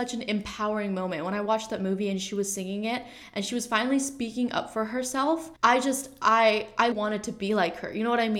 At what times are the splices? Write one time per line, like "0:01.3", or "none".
0:05.6
0:06.9